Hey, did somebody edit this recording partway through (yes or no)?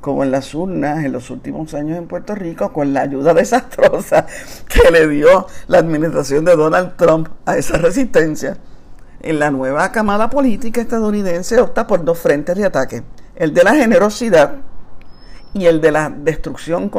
no